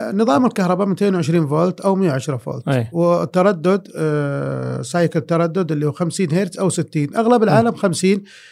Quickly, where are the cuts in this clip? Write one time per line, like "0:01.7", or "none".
none